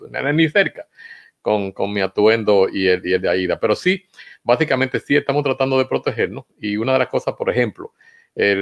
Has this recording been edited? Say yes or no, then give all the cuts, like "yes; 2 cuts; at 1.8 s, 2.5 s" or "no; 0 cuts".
no; 0 cuts